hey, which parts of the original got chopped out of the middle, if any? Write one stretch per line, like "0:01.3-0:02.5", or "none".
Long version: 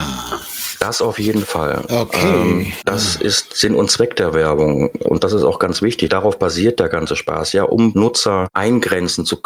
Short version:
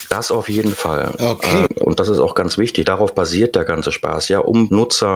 0:02.4-0:04.9